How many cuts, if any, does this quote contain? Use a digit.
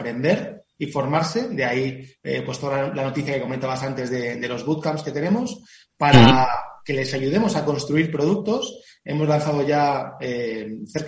0